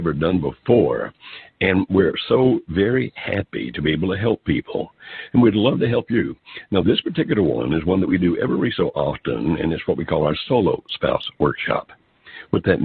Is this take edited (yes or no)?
no